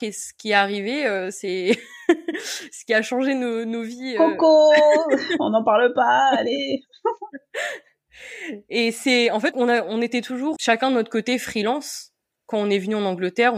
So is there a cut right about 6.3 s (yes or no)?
no